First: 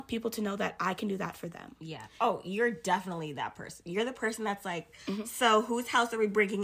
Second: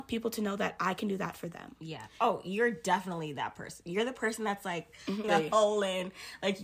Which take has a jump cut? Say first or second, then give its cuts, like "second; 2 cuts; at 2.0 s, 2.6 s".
second; 1 cut; at 5.2 s